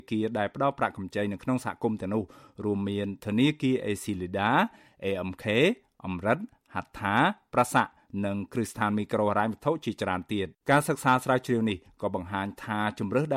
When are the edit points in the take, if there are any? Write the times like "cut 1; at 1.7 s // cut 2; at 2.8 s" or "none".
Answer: cut 1; at 10.6 s